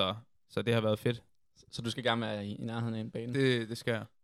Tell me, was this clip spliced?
no; 0 cuts

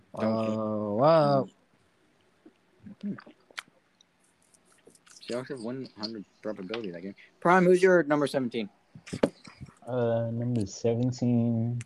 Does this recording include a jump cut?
yes; 1 cut; at 9.8 s

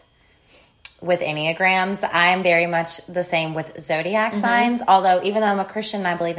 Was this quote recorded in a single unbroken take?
yes; 0 cuts

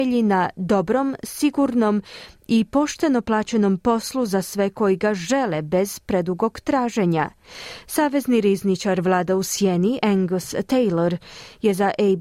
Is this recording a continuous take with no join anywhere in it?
yes; 0 cuts

